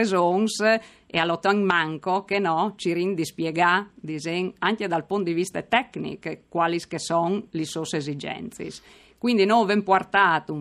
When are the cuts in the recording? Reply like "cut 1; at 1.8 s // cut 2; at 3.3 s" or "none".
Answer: none